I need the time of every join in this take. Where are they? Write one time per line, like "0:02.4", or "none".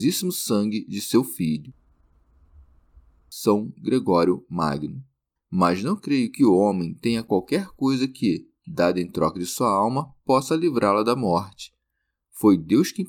0:05.4

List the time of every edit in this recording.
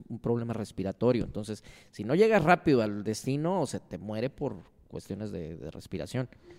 0:05.6

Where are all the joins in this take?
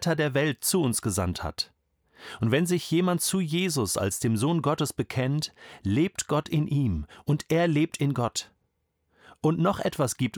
none

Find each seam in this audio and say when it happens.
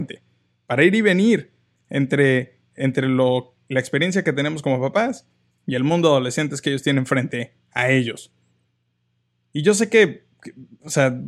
none

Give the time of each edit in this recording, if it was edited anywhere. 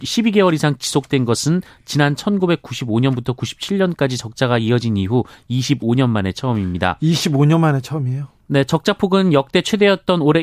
none

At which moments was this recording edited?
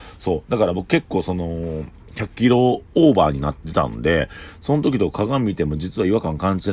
none

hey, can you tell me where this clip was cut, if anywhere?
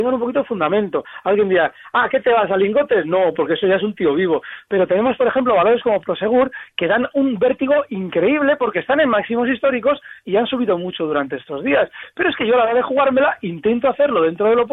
none

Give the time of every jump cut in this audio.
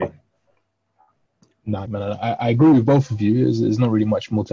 0:01.9

